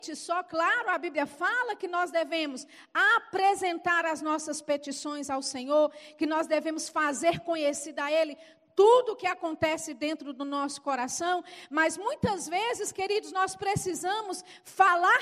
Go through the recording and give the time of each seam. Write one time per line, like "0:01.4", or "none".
none